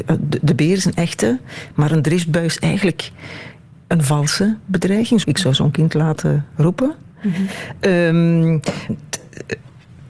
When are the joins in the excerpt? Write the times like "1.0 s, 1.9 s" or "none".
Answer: 5.2 s, 8.9 s